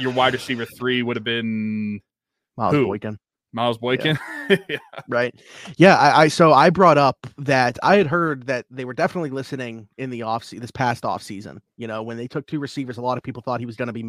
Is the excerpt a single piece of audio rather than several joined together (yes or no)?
yes